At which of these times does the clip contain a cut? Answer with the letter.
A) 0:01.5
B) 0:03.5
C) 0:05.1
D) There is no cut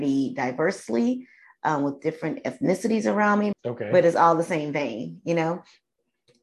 B